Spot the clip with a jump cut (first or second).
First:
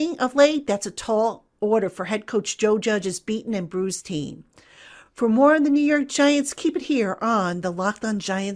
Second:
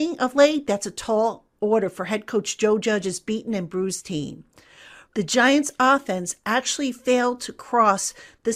second